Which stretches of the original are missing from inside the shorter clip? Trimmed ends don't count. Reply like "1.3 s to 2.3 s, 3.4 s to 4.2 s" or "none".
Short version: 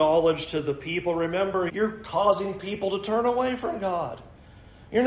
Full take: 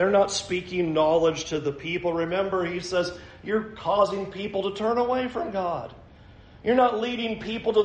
2.7 s to 3.4 s